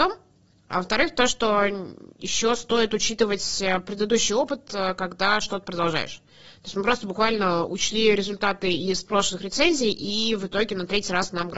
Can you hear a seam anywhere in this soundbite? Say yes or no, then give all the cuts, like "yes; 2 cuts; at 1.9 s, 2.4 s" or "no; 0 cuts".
no; 0 cuts